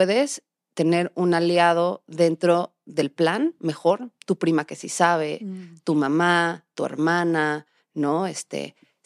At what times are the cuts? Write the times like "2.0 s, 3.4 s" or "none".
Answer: none